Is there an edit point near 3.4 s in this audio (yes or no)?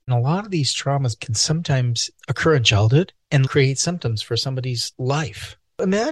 yes